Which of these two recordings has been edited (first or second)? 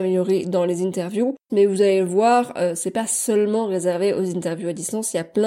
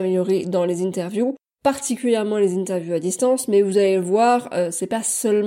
first